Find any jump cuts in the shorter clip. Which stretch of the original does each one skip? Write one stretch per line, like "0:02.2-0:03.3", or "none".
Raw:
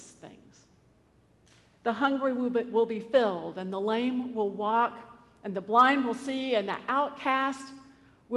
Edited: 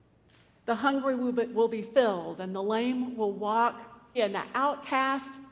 0:05.3-0:06.5